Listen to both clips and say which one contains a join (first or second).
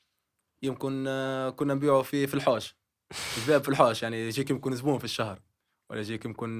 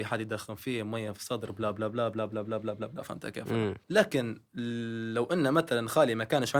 second